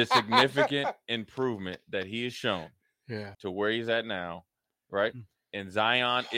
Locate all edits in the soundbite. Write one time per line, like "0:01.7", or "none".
0:03.3